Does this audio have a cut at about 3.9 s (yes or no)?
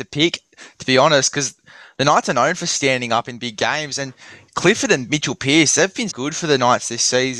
no